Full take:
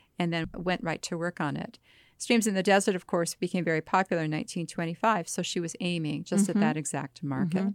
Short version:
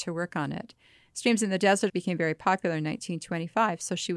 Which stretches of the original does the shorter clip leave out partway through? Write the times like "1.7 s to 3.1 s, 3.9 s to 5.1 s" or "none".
2.9 s to 3.4 s